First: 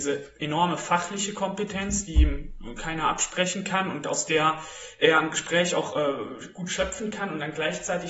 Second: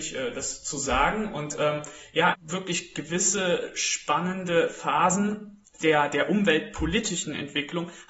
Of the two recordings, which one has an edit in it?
second; 1 cut; at 2.3 s

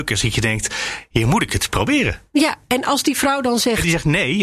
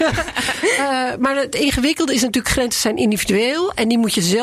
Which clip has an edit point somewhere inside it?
second; 1 cut; at 1.2 s

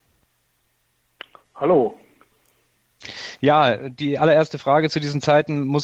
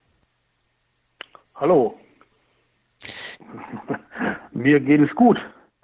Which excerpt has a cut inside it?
second; 1 cut; at 3.4 s

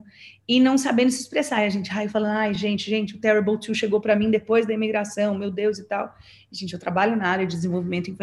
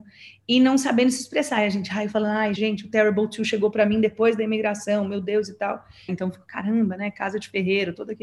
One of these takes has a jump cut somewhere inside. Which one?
second; 2 cuts; at 2.6 s, 6.1 s

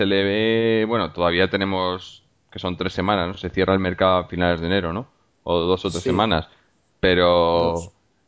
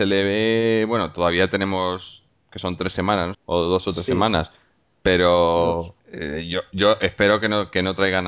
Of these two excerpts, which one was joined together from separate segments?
second; 2 cuts; at 3.3 s, 6.0 s

